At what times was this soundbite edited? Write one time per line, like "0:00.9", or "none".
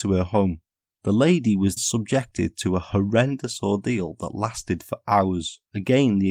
0:01.8